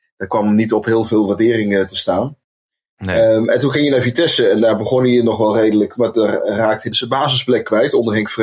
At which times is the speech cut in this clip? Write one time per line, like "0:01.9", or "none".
0:06.9